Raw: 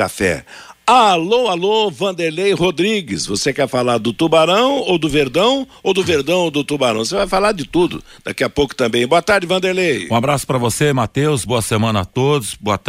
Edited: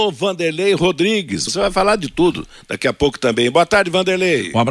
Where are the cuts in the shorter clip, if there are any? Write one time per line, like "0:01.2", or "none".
0:01.5